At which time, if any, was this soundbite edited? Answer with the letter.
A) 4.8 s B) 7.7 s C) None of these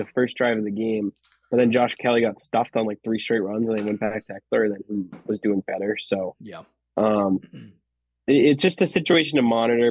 C